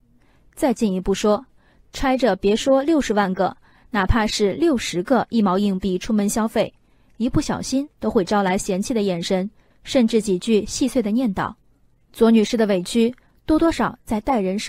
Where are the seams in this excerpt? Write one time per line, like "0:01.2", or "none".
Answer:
0:13.7